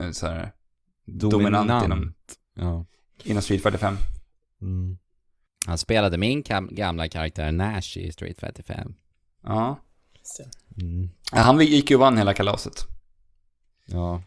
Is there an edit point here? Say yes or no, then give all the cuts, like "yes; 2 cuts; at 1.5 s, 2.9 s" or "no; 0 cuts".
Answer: no; 0 cuts